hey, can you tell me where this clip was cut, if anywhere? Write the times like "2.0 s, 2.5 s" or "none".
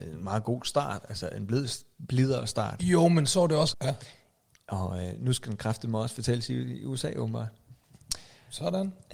3.7 s